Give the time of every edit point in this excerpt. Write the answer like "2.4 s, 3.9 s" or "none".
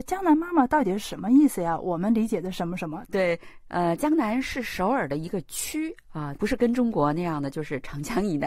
3.1 s, 6.4 s